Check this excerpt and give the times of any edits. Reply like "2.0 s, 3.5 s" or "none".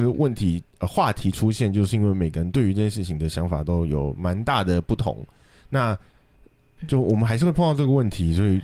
6.8 s